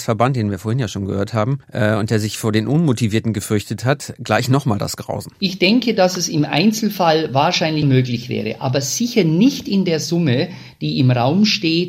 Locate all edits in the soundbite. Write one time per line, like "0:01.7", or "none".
0:01.6
0:07.8